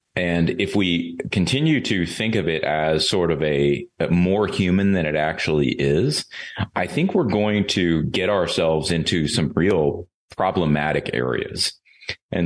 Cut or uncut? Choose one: uncut